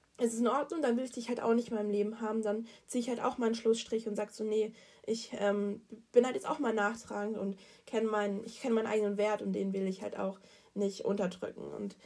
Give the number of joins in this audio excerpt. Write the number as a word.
zero